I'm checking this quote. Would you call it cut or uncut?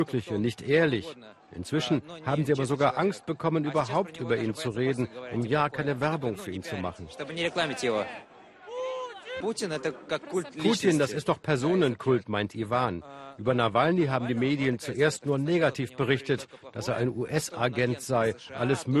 cut